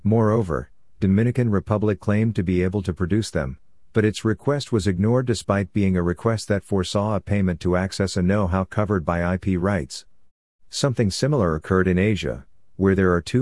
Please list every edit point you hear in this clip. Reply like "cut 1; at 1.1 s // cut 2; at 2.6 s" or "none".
none

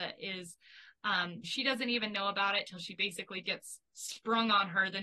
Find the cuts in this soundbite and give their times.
cut 1; at 1.4 s

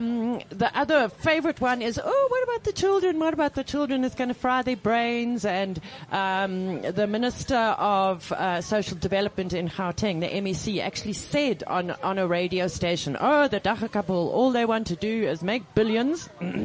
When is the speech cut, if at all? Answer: none

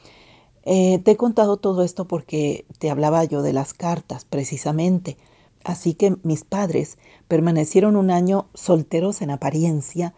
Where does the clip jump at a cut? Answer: cut 1; at 5.5 s

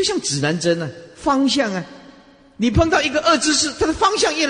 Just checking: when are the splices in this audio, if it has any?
none

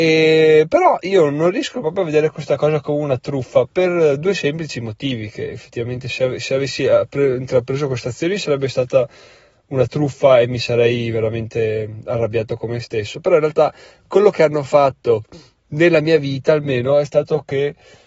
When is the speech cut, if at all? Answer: none

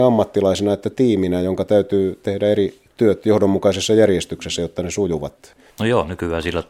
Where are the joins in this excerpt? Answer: cut 1; at 5.7 s

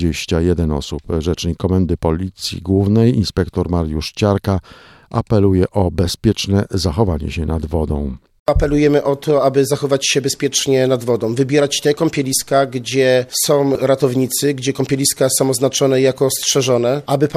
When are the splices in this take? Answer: none

